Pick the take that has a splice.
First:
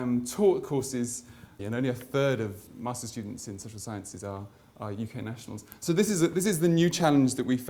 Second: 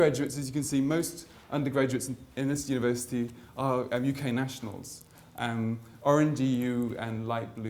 first; 1 cut; at 1.6 s

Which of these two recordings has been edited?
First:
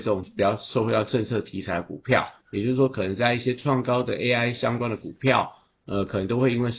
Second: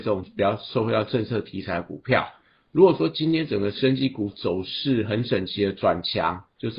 first; 2 cuts; at 2.4 s, 5.8 s

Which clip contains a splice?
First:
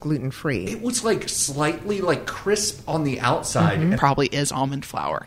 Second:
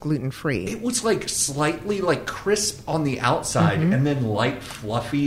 first; 1 cut; at 3.9 s

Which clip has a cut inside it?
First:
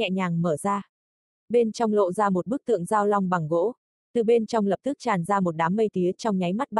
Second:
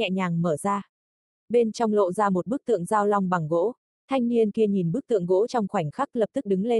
first; 1 cut; at 4.0 s

